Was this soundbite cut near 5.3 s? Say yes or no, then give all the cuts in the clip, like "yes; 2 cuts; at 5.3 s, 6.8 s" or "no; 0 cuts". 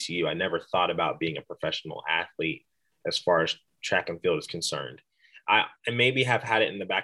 no; 0 cuts